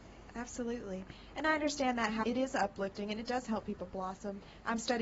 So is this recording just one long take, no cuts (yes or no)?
no